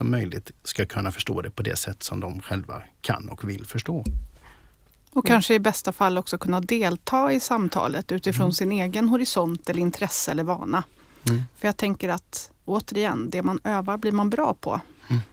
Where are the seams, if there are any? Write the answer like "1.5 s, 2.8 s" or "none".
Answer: none